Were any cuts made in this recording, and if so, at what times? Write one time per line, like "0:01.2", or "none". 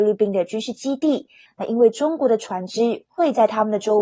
0:01.5